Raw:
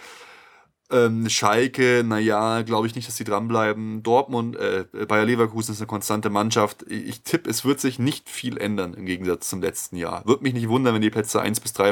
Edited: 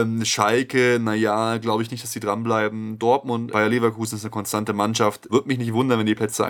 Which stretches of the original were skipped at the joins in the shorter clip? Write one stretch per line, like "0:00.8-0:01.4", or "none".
0:04.6-0:05.1
0:06.8-0:10.2